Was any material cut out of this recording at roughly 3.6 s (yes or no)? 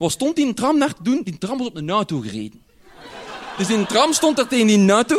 no